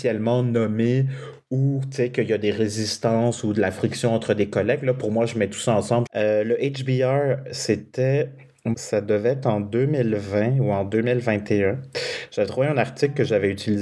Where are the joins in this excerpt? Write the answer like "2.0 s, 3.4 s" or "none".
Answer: 6.1 s, 8.7 s